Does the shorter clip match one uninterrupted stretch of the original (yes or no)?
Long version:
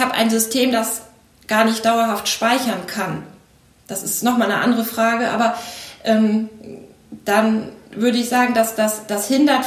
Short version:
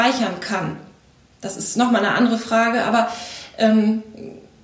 yes